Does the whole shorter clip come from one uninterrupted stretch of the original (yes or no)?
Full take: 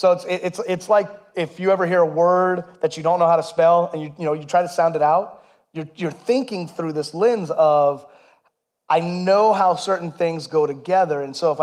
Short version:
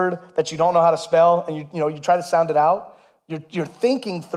yes